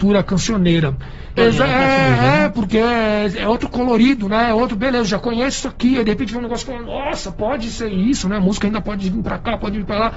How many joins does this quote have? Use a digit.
1